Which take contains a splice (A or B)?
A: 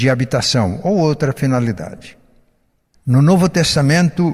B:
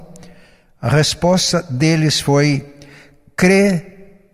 A